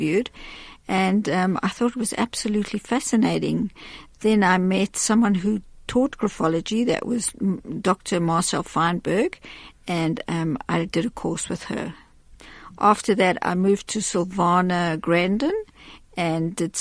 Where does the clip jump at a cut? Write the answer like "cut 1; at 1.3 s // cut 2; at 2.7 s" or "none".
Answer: none